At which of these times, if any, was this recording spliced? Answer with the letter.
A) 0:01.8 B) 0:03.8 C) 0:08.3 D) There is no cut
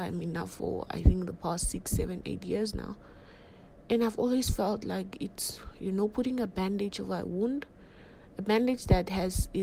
D